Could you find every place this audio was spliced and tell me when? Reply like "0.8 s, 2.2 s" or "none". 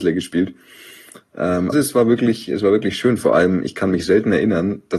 1.7 s